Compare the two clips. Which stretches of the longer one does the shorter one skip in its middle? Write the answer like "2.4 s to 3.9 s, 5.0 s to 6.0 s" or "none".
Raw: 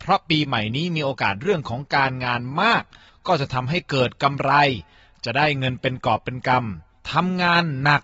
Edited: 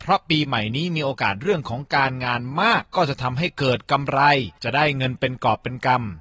2.8 s to 3.1 s, 4.9 s to 5.2 s